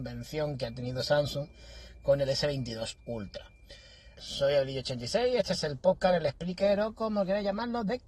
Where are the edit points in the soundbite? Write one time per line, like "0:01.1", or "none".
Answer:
0:04.1